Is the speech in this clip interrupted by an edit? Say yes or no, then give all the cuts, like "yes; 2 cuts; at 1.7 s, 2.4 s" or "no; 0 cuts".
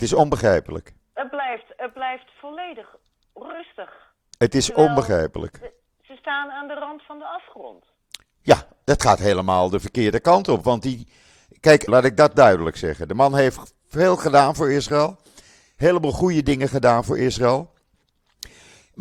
yes; 1 cut; at 11.9 s